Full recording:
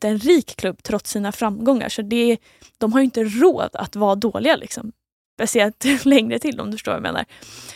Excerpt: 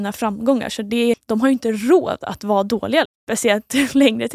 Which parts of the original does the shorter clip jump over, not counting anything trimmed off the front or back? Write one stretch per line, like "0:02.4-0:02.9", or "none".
0:02.3-0:02.7
0:04.6-0:05.2